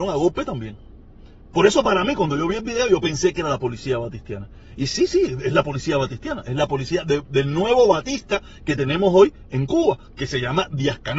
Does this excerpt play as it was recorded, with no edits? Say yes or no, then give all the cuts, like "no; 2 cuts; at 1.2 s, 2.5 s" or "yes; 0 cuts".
yes; 0 cuts